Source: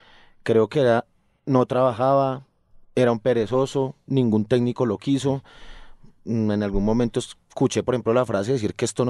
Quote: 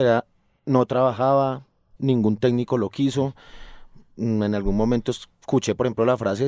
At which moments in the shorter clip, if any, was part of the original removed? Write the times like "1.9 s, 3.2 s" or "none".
2.0 s